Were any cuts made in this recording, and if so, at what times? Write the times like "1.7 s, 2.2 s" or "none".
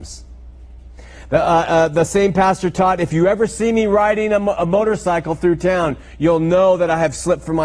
none